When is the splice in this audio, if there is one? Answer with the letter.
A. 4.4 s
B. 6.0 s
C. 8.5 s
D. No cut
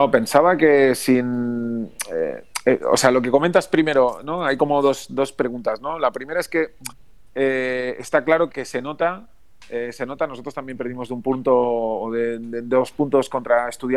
C